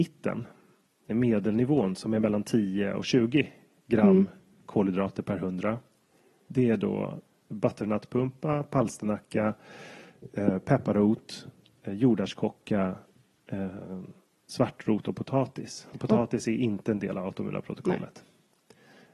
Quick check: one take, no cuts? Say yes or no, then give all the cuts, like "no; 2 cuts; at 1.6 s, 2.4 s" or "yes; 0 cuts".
yes; 0 cuts